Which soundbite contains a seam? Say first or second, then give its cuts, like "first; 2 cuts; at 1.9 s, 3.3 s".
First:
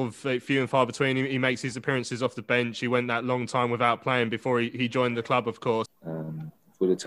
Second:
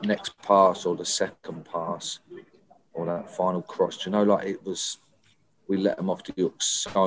first; 1 cut; at 5.9 s